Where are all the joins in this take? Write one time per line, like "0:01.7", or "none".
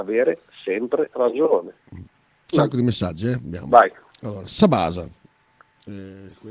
0:02.5